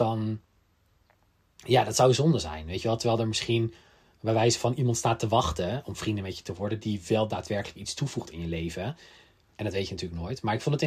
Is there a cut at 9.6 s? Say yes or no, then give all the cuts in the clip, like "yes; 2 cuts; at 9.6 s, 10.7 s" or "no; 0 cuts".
yes; 1 cut; at 9.6 s